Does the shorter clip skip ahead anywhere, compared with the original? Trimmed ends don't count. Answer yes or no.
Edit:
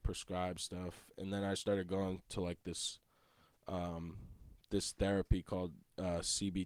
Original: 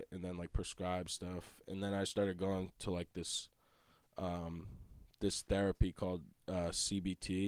no